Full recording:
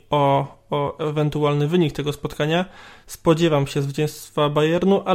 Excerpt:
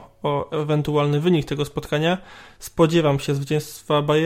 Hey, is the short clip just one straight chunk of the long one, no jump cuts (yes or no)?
yes